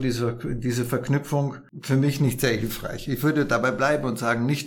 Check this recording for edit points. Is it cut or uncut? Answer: uncut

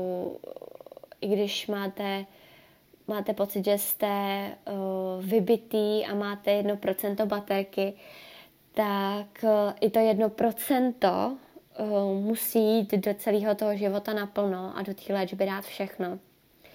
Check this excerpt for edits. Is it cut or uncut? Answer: uncut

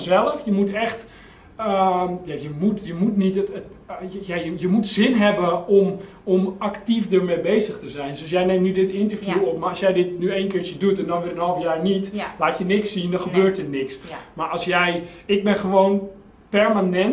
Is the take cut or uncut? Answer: uncut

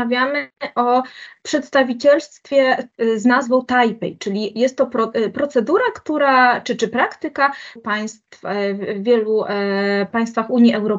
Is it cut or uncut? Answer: cut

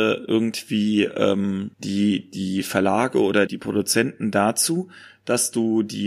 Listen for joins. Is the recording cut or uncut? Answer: cut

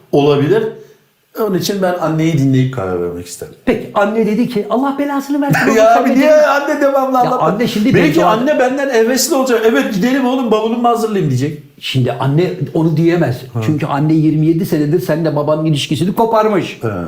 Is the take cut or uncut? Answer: uncut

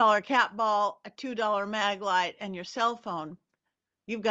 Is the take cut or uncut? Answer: uncut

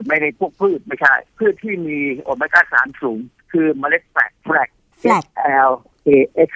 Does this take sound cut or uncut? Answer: cut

